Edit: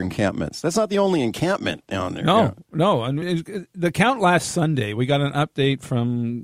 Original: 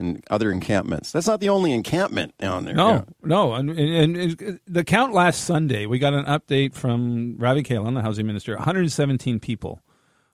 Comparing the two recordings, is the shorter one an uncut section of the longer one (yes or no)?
no